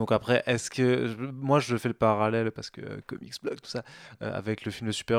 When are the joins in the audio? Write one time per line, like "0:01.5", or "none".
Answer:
none